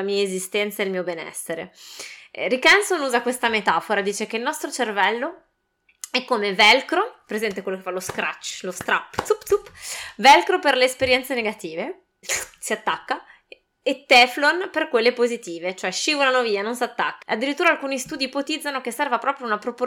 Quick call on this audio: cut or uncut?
cut